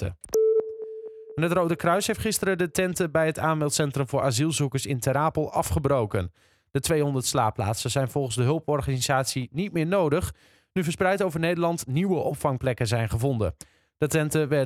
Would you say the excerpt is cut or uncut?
uncut